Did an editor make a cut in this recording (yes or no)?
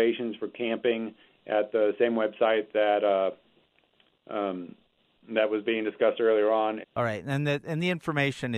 yes